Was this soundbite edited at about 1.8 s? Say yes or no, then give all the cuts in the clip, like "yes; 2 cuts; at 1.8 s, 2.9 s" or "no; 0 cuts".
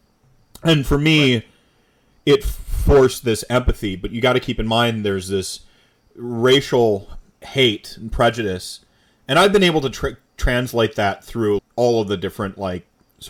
no; 2 cuts; at 7.3 s, 11.6 s